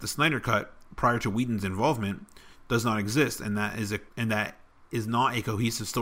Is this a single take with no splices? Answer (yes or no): no